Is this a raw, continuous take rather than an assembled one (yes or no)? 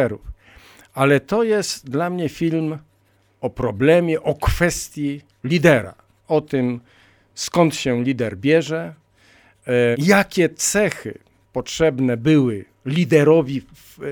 no